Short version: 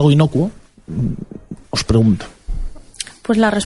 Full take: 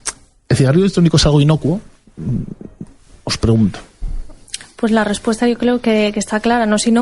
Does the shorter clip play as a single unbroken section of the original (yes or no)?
no